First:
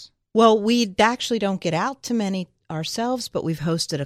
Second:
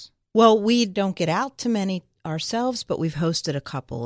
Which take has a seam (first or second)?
second